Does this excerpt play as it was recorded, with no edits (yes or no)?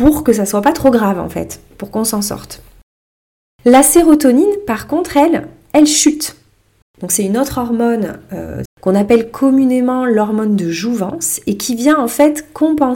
no